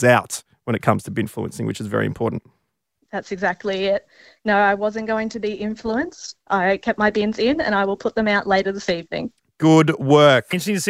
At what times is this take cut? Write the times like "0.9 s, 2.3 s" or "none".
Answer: none